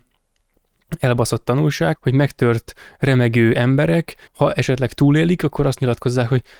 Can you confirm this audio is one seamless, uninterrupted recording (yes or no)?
no